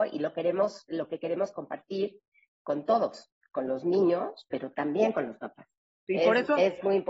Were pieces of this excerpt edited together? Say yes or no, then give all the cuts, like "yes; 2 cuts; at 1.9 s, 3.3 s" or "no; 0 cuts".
yes; 1 cut; at 6.1 s